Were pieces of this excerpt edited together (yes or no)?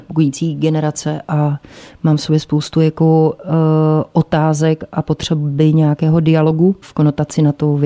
yes